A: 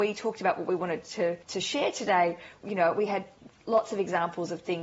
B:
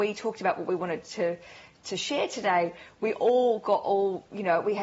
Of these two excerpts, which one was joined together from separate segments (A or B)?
A